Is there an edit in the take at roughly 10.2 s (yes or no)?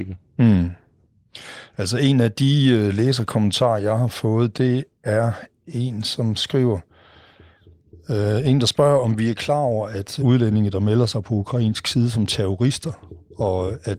yes